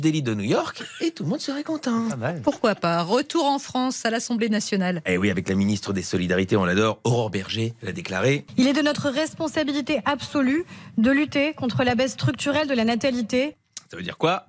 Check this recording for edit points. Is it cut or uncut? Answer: uncut